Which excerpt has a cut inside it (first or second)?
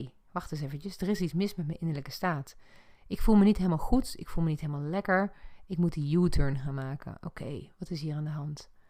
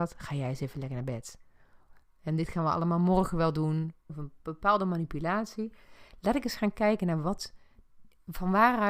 second